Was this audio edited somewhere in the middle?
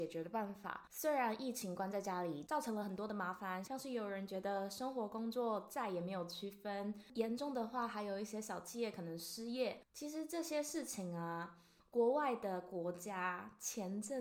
no; 0 cuts

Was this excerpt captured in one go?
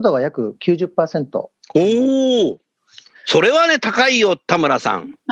yes; 0 cuts

